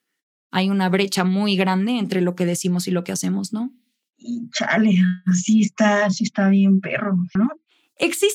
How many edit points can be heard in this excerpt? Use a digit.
1